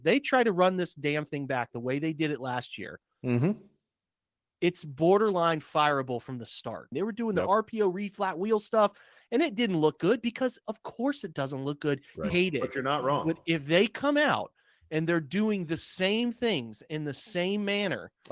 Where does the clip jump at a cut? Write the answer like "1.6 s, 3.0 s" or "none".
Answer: 6.9 s, 12.3 s